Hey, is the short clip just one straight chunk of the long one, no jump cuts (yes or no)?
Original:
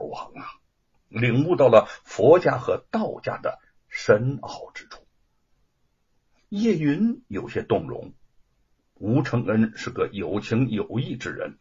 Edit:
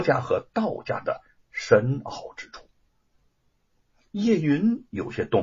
yes